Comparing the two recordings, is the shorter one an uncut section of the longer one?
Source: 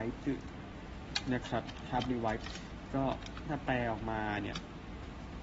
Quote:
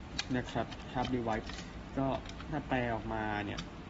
yes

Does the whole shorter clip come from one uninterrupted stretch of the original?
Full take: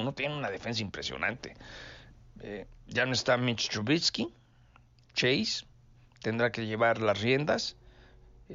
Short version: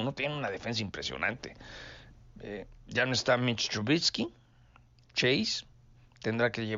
yes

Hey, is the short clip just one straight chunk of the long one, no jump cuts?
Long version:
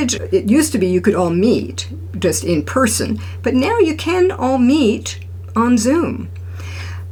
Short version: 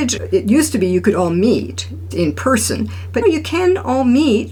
no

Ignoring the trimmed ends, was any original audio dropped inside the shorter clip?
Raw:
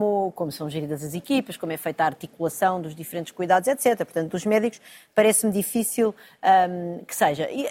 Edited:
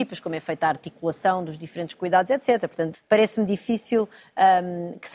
yes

